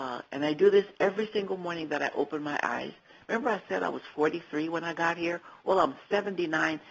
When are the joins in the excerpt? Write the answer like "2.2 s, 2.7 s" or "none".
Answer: none